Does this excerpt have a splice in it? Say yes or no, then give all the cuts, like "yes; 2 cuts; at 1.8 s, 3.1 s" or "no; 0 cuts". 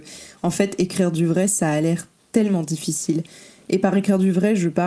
no; 0 cuts